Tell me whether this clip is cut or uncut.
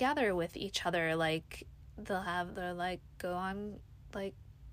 uncut